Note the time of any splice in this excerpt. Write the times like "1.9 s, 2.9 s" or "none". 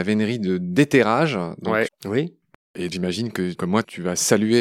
1.9 s, 2.9 s